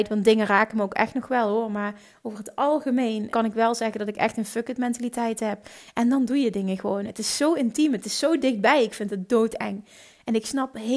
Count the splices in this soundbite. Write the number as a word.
two